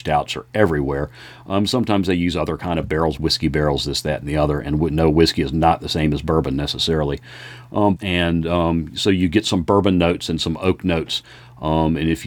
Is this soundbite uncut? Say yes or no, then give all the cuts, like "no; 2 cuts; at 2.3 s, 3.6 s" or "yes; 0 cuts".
no; 2 cuts; at 3.2 s, 8.0 s